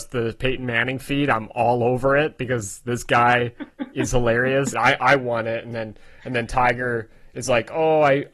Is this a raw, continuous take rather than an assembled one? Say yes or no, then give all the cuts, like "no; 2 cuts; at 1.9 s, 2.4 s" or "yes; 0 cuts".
no; 1 cut; at 4.7 s